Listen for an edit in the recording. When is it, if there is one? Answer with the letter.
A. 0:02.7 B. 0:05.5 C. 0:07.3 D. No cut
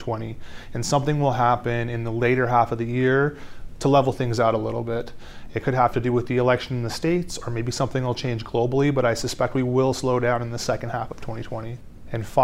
D